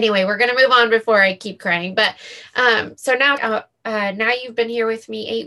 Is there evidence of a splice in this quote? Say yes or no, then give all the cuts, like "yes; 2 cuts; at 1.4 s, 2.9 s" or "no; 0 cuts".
yes; 1 cut; at 3.4 s